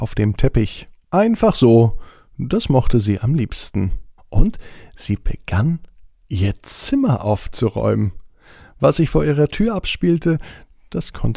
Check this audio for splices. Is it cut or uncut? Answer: cut